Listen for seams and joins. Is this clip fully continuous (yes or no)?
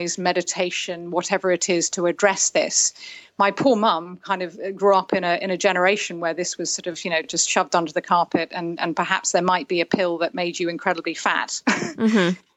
yes